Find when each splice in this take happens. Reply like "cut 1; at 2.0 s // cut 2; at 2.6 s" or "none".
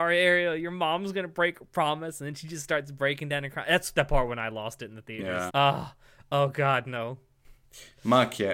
cut 1; at 5.5 s